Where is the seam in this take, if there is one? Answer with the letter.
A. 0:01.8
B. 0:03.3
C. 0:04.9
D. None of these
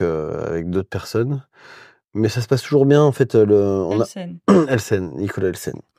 D